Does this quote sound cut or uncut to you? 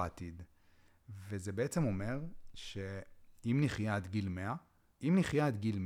cut